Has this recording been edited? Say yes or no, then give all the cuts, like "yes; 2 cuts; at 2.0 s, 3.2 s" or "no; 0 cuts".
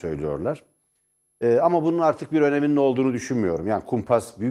no; 0 cuts